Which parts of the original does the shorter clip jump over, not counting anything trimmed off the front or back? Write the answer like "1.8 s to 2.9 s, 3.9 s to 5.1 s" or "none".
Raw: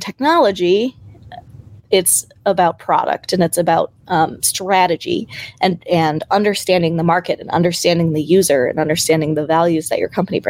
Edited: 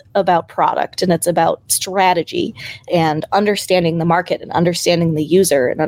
4.0 s to 4.4 s, 5.6 s to 5.8 s